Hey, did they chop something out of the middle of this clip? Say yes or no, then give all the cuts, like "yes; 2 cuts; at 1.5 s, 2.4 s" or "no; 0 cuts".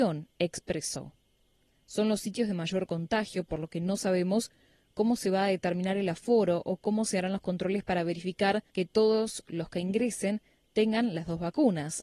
yes; 2 cuts; at 1.7 s, 8.7 s